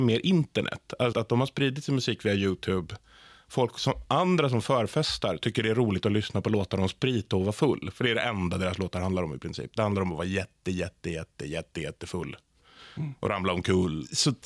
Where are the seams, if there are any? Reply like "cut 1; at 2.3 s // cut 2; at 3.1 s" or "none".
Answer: cut 1; at 1.1 s